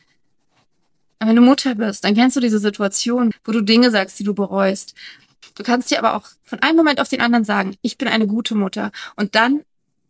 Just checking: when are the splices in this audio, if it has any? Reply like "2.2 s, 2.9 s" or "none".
3.3 s, 5.4 s